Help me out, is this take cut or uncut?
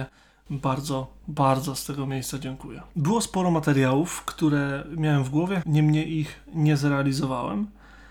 cut